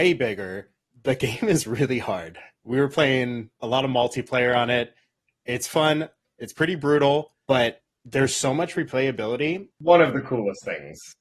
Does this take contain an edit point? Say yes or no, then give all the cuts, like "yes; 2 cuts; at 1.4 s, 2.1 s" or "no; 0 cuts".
yes; 1 cut; at 9.8 s